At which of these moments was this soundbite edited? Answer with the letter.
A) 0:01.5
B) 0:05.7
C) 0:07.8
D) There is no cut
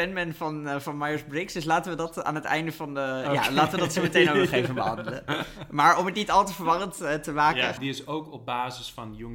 C